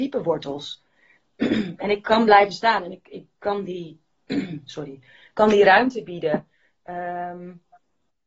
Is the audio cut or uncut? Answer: uncut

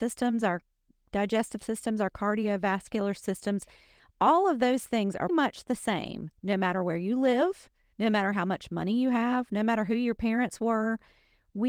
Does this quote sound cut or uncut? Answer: cut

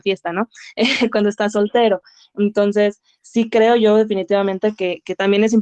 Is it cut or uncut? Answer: uncut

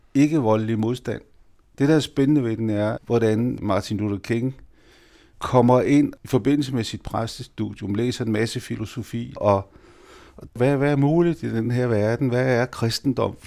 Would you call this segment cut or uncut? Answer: cut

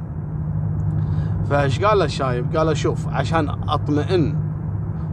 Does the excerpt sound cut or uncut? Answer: uncut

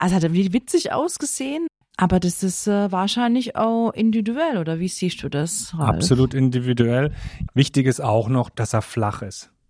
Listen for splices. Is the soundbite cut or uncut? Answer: cut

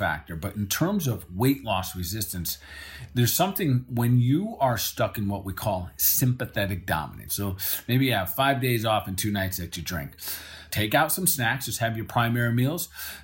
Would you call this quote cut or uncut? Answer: cut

